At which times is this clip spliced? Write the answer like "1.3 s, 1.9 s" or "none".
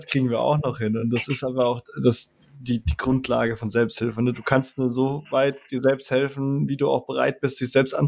none